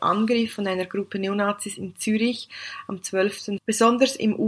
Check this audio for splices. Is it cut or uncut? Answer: cut